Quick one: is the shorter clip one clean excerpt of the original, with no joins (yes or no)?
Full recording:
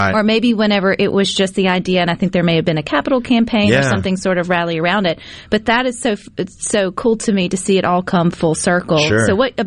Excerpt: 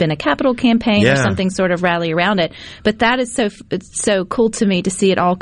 yes